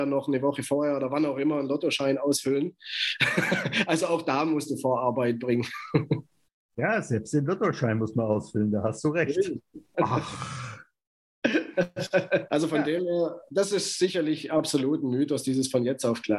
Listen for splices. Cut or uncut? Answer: cut